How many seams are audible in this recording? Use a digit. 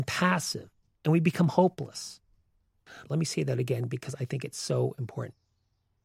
2